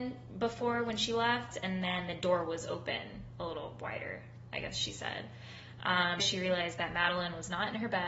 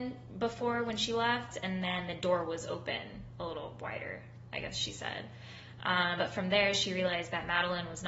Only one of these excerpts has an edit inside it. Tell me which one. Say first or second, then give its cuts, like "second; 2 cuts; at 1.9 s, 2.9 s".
first; 1 cut; at 6.2 s